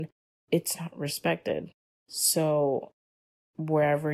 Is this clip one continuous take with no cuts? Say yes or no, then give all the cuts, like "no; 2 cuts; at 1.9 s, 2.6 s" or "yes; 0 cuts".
no; 1 cut; at 1.9 s